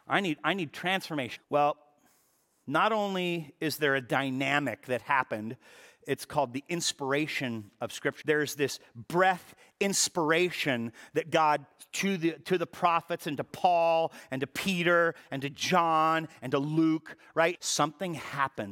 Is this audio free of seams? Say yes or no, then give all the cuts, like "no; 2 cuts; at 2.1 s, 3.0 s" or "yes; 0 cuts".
no; 3 cuts; at 1.4 s, 8.2 s, 17.5 s